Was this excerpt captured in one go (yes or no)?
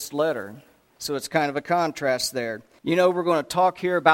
no